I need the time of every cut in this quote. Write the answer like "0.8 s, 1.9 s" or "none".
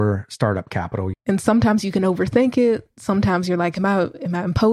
1.1 s